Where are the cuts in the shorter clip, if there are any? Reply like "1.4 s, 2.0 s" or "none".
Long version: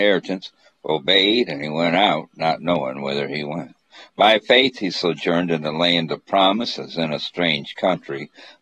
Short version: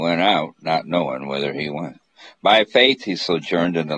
none